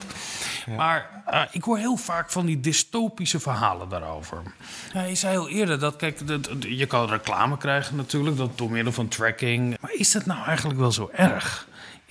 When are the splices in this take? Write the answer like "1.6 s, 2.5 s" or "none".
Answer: 4.9 s, 9.8 s